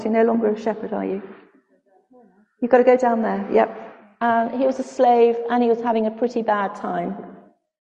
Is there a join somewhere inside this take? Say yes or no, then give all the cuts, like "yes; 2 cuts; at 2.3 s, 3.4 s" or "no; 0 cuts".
no; 0 cuts